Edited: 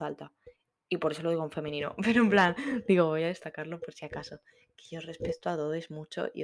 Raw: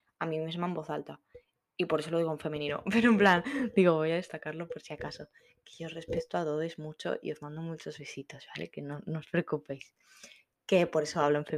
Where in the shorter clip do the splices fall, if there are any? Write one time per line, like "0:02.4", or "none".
none